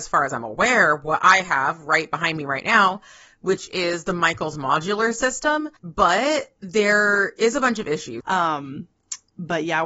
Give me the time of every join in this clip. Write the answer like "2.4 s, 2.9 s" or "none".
5.8 s, 8.2 s